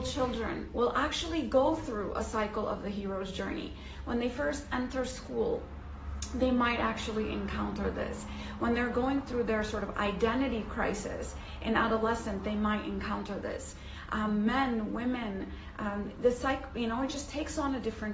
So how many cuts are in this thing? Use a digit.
0